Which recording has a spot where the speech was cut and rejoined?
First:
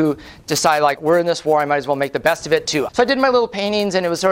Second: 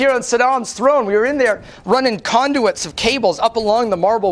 first; 2 cuts; at 1.0 s, 2.9 s

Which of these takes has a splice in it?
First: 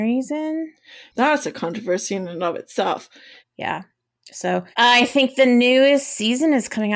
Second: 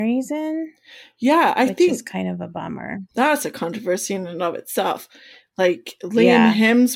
first; 3 cuts; at 1.1 s, 3.4 s, 4.7 s

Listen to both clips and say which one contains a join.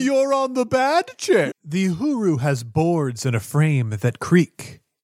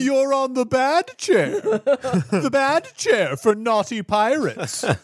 first; 1 cut; at 1.5 s

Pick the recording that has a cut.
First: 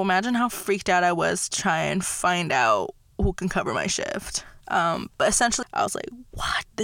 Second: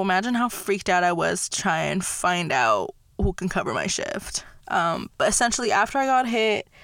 first; 1 cut; at 5.6 s

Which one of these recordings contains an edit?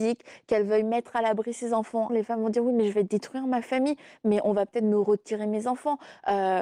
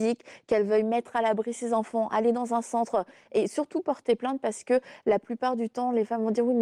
first; 1 cut; at 2.1 s

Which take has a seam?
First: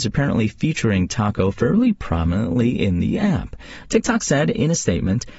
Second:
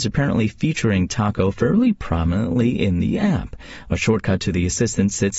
first; 1 cut; at 3.8 s

